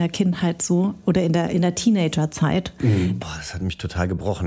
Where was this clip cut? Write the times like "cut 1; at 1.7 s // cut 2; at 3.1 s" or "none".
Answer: cut 1; at 3.2 s

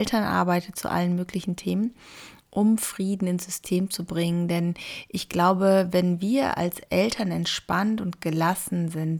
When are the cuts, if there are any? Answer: none

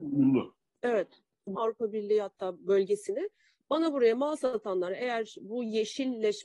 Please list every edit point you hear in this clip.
cut 1; at 1.5 s

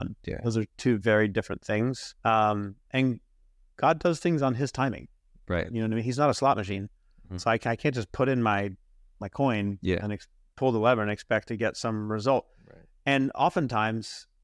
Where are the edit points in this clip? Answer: cut 1; at 2.2 s

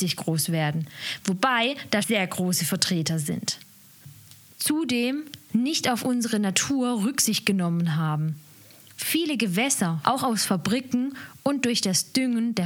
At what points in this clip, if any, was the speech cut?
cut 1; at 2.0 s // cut 2; at 4.5 s // cut 3; at 10.0 s

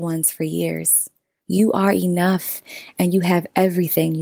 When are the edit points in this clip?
cut 1; at 1.4 s

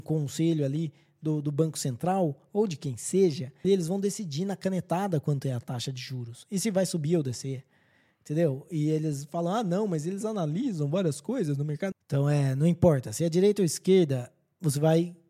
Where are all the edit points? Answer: cut 1; at 3.6 s // cut 2; at 11.9 s

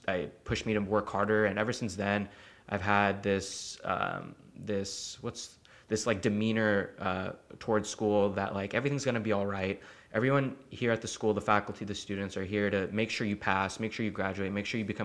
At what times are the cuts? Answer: none

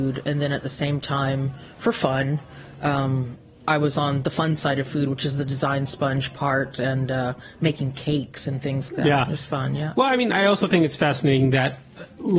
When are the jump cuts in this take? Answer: cut 1; at 8.9 s

